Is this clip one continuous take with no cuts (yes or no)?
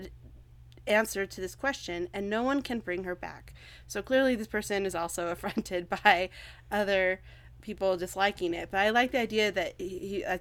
yes